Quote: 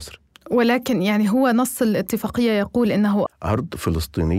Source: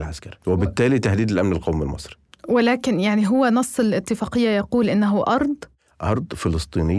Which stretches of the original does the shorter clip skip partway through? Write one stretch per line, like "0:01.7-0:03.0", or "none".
0:05.2-0:05.8